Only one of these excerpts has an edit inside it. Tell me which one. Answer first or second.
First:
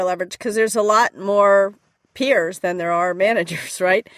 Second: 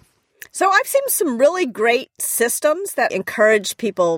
second